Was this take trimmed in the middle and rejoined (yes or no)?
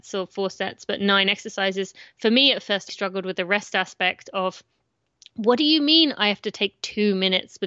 yes